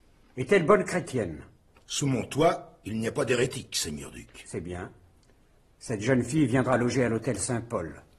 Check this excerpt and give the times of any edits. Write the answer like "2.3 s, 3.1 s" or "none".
none